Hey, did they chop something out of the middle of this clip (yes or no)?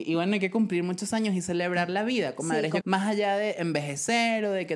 yes